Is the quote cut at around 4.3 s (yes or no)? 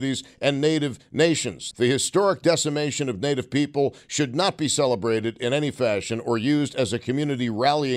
no